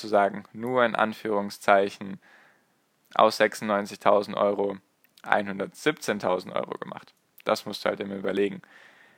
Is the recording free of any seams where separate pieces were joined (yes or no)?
yes